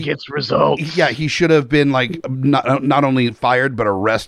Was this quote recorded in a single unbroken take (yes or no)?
yes